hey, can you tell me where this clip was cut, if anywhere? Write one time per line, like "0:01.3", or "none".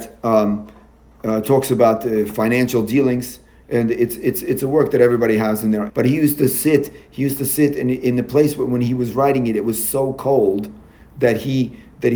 0:05.9